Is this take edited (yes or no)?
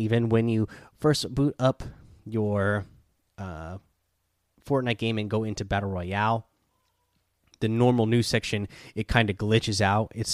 no